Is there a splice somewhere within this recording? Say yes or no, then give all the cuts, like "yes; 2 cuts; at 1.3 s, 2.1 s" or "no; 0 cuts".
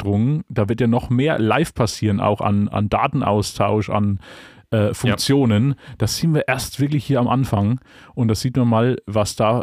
no; 0 cuts